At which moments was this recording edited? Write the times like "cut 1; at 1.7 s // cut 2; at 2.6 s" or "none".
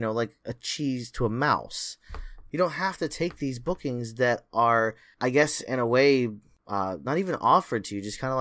none

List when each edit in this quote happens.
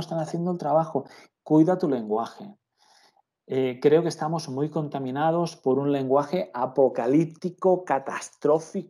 cut 1; at 1.3 s

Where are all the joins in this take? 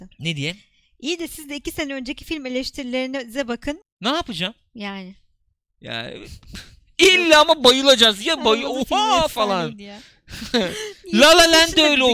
cut 1; at 3.8 s

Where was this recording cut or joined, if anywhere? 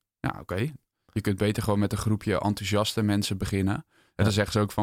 cut 1; at 0.9 s

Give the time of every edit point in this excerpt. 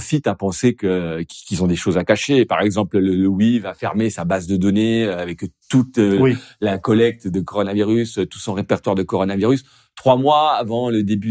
none

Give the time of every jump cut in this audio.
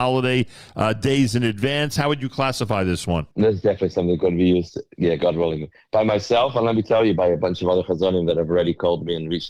cut 1; at 3.3 s

